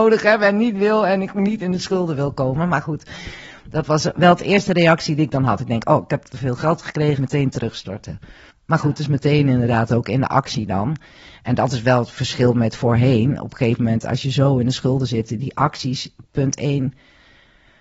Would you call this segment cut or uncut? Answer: cut